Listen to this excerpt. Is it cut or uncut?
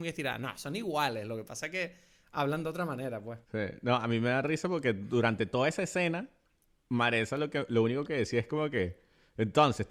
cut